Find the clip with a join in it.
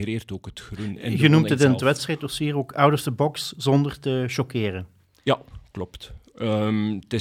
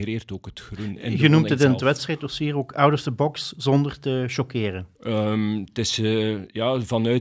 second; 1 cut; at 5.0 s

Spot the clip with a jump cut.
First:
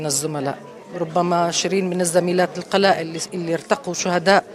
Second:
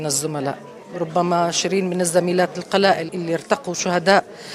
second; 1 cut; at 3.1 s

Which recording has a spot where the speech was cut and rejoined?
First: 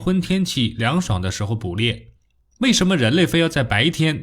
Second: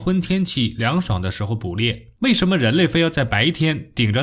second; 1 cut; at 2.2 s

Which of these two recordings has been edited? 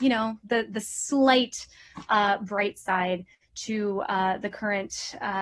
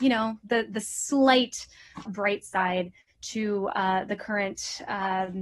second; 1 cut; at 2.1 s

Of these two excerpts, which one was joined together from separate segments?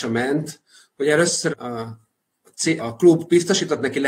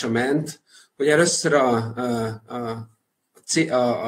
first; 2 cuts; at 1.5 s, 2.8 s

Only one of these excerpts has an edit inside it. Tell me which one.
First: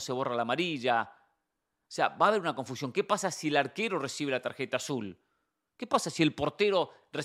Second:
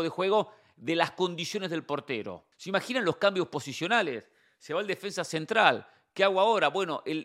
second; 1 cut; at 2.5 s

